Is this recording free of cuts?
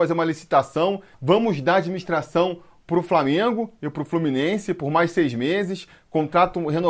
no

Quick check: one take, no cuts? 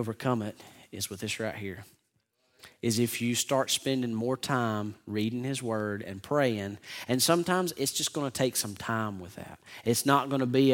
yes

